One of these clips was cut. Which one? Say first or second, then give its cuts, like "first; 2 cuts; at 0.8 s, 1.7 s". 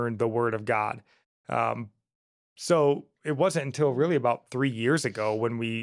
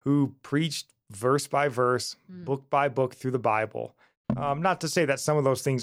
second; 1 cut; at 4.2 s